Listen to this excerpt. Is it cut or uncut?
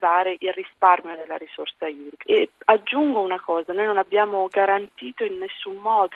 cut